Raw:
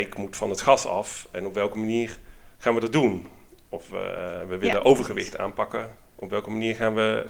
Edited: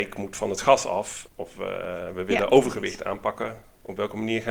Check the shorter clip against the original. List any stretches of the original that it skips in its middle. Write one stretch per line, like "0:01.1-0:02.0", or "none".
0:01.3-0:03.6